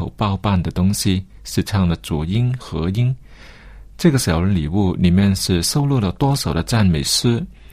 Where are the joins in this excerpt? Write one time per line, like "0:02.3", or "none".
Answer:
0:02.6